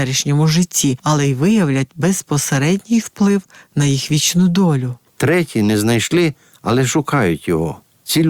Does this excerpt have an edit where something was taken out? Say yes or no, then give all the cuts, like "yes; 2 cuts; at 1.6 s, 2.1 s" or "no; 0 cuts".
yes; 1 cut; at 5.1 s